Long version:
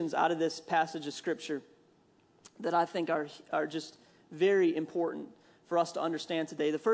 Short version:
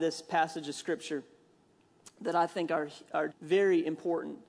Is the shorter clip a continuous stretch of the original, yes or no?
no